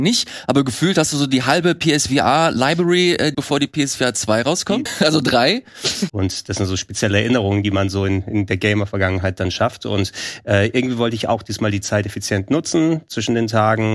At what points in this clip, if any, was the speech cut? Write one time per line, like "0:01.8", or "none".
0:03.3
0:04.9
0:06.1